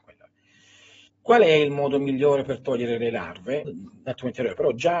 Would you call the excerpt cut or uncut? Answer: cut